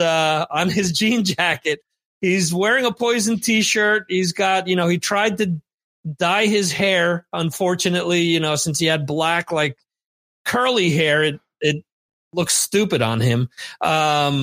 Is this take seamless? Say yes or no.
yes